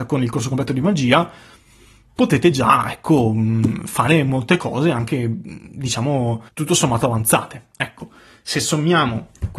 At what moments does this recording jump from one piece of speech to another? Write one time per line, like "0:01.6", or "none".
0:06.5